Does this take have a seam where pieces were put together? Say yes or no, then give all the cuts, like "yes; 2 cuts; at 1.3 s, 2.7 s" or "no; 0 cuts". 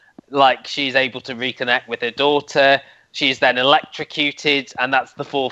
no; 0 cuts